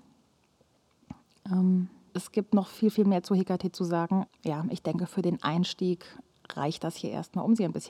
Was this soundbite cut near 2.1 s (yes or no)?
yes